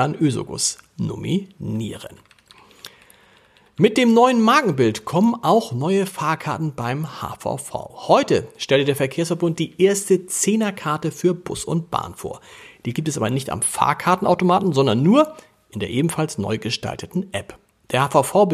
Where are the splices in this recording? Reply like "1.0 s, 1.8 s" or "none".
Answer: none